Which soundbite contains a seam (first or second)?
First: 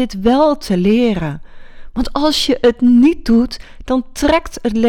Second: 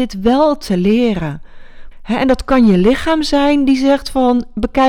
second